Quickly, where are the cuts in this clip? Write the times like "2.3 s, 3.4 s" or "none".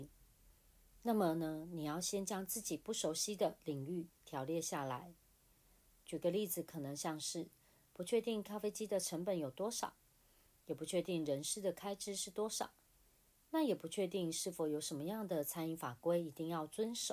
none